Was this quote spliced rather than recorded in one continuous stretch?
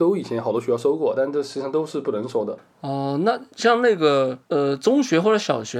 no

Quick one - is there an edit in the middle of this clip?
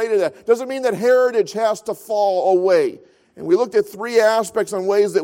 yes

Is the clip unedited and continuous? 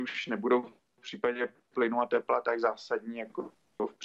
yes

